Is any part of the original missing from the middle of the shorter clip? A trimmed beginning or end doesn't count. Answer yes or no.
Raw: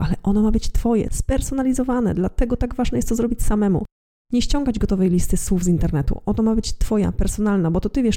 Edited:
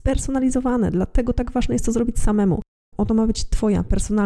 yes